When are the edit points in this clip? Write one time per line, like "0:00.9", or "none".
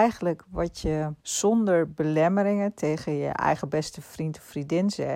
0:01.2